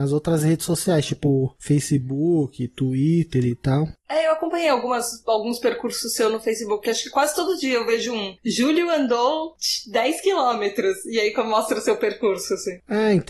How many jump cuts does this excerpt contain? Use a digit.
0